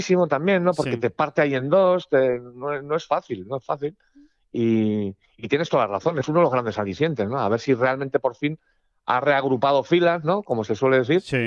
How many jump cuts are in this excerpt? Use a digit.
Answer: 0